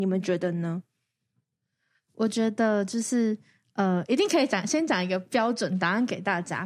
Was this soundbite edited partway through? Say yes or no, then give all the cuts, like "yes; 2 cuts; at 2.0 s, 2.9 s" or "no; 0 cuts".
no; 0 cuts